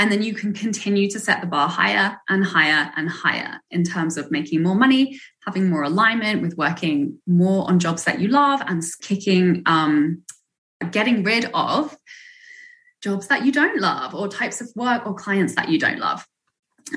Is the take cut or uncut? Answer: cut